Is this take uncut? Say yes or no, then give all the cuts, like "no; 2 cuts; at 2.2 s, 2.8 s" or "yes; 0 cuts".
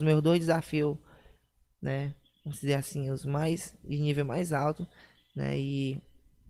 yes; 0 cuts